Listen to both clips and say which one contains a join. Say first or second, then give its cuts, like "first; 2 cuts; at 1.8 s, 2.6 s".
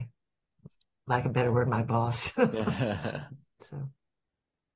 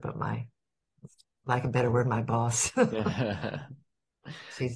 first; 1 cut; at 3.6 s